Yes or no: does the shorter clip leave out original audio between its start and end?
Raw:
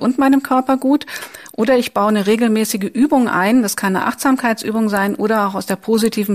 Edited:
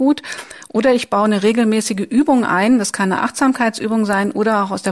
no